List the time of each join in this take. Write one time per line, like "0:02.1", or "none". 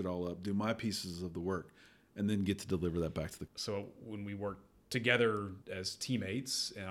0:03.5
0:05.6